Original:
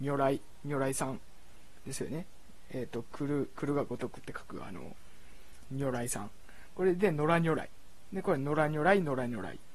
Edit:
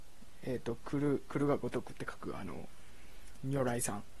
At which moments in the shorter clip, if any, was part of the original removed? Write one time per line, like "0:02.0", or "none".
none